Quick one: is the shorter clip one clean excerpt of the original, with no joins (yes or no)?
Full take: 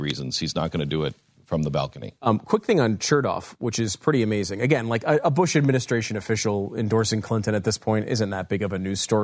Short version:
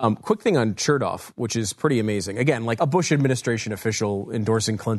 no